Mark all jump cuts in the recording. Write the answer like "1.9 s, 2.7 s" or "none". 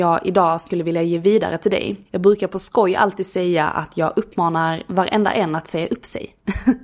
2.0 s

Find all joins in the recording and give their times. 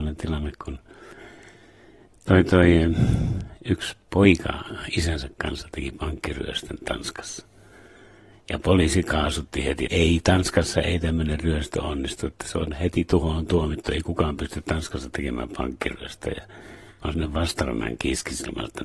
9.9 s

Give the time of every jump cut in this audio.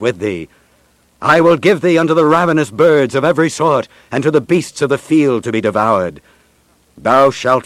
none

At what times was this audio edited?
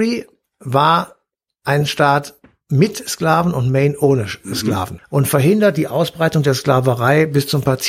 5.0 s

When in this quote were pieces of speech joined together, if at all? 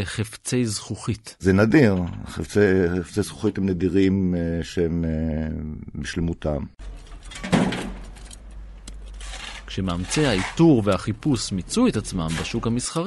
none

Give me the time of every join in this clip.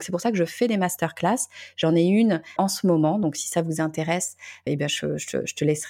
2.6 s, 4.7 s

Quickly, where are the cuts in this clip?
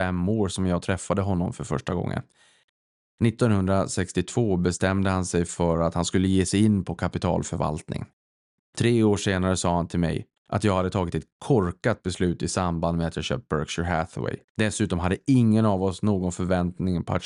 10.4 s, 14.4 s

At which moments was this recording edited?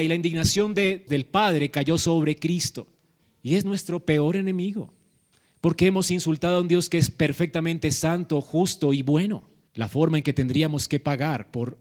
1.1 s, 3.2 s, 9.7 s

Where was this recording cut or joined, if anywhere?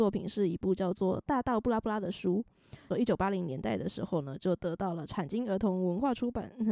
2.9 s

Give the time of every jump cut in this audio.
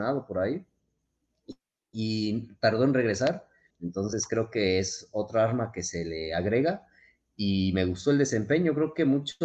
3.7 s

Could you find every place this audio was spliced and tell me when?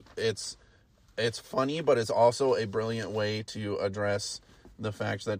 none

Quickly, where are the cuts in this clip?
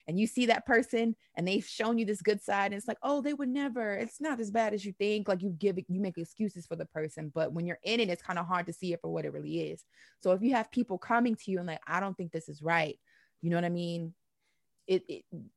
none

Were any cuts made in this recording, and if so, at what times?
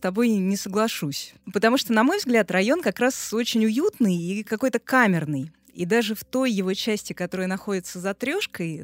none

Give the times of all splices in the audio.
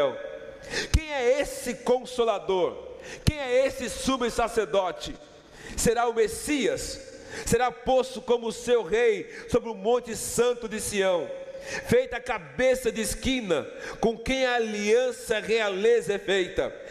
none

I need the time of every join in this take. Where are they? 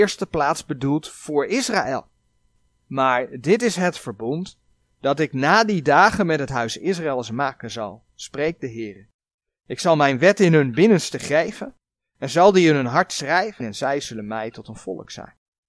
2.8 s, 13.6 s

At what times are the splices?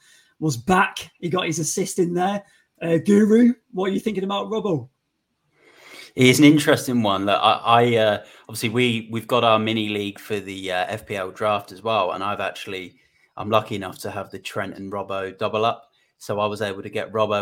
none

